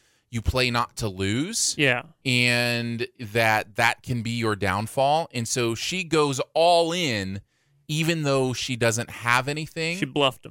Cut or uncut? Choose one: uncut